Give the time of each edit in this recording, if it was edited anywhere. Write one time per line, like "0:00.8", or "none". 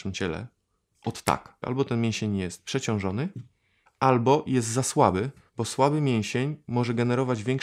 0:01.6
0:03.9
0:05.5